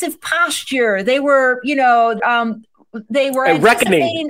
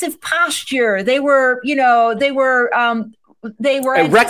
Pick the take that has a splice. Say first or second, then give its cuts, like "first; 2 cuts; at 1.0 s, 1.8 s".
first; 1 cut; at 2.2 s